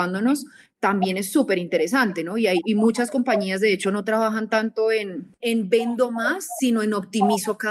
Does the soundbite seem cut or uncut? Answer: cut